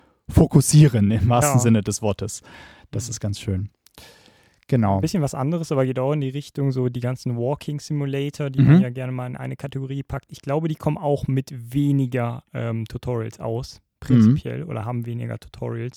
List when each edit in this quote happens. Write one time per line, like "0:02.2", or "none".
none